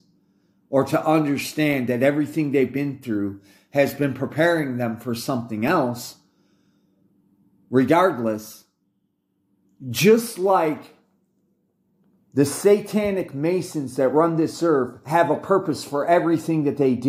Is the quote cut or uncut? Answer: uncut